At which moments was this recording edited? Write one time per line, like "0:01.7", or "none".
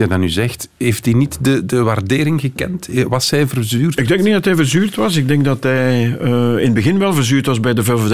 0:04.0